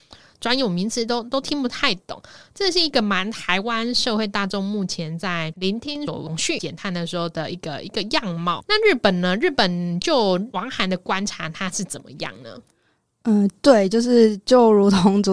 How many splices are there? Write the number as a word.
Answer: zero